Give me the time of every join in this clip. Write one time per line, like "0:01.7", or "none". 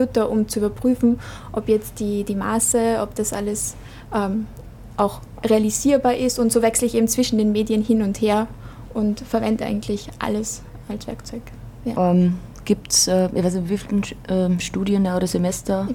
0:11.9

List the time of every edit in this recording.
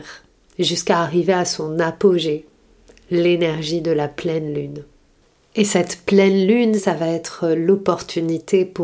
0:06.8

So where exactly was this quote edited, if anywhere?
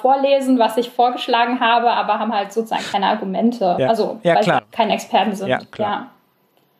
0:04.6

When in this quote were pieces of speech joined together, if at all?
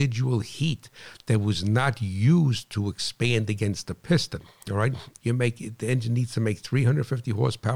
0:05.2

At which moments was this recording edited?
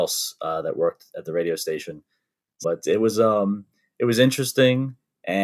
0:02.6

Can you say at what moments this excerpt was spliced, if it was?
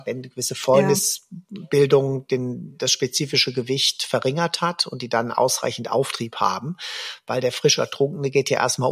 none

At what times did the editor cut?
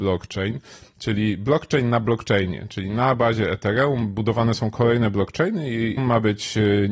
0:06.0

